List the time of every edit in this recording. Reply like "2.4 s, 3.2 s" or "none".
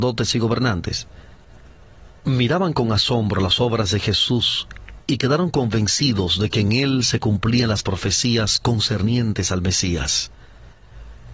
2.2 s